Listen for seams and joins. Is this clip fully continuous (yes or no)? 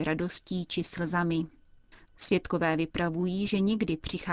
no